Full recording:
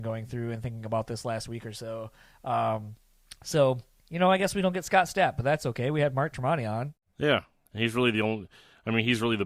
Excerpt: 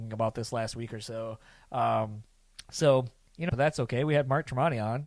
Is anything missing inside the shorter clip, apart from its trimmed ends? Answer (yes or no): yes